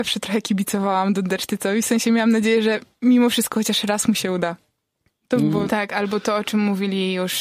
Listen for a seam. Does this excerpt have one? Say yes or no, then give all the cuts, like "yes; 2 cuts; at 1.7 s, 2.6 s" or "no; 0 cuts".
yes; 1 cut; at 5.7 s